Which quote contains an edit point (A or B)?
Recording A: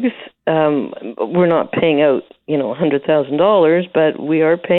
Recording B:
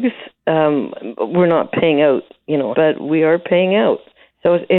B